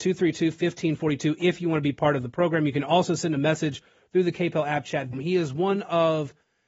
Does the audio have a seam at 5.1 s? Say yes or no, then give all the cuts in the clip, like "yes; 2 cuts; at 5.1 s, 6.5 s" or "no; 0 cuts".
yes; 1 cut; at 5.1 s